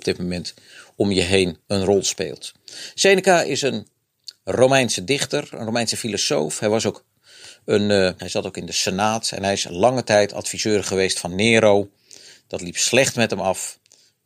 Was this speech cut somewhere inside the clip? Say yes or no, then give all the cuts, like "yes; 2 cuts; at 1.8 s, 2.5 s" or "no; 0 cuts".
yes; 3 cuts; at 1.6 s, 5.5 s, 8.2 s